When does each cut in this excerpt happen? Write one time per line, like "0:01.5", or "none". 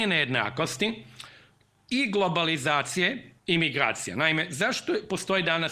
0:03.4